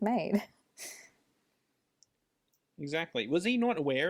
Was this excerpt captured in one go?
yes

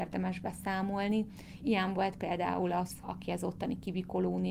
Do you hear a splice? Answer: yes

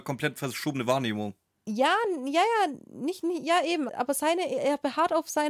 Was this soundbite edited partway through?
yes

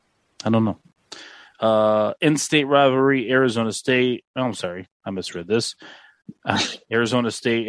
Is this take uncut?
yes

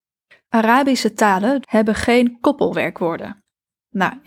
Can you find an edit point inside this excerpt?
yes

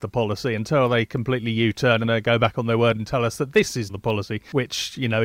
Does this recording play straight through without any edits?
no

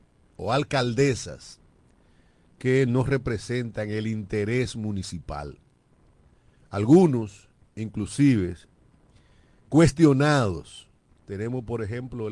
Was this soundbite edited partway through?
yes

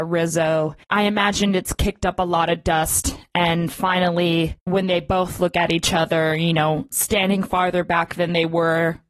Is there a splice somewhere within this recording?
no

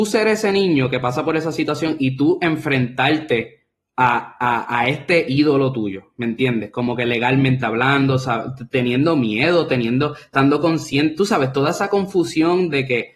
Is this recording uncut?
yes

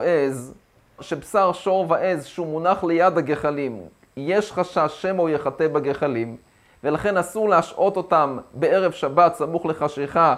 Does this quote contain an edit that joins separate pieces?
yes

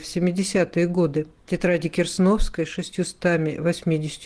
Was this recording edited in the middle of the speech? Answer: yes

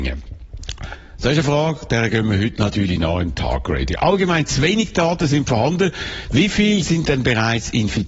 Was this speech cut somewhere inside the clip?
no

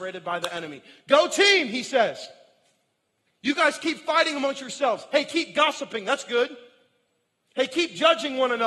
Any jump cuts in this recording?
no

